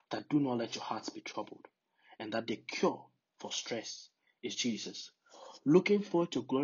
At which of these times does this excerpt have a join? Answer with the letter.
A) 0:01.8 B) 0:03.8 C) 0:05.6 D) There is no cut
D